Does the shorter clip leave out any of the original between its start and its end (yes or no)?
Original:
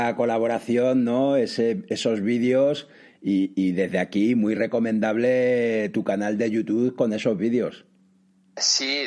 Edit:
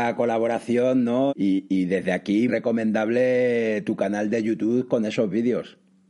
yes